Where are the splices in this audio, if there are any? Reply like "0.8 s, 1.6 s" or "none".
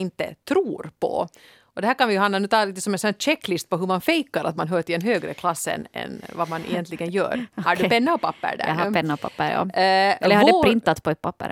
none